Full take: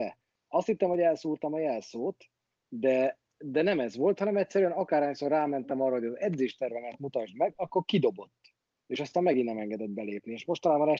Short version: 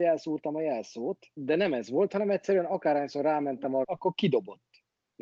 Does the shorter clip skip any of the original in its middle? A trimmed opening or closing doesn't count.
yes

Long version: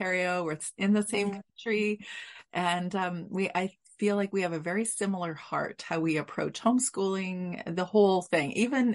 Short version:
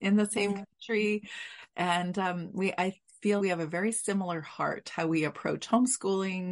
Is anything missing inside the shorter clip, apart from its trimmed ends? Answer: yes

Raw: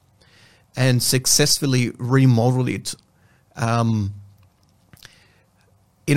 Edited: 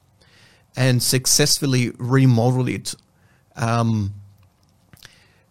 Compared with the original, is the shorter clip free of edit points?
yes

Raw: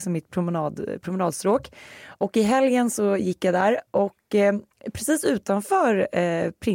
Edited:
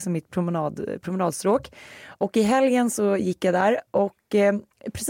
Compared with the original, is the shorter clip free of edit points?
yes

